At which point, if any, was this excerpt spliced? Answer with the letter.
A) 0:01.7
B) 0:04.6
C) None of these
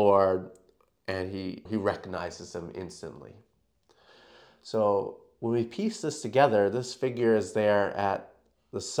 A